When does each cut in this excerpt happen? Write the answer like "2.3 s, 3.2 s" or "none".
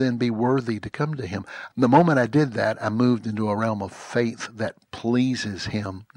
1.7 s